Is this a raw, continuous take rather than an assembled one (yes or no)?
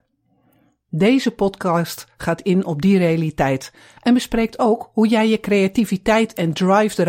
yes